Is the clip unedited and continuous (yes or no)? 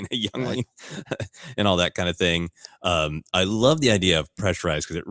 yes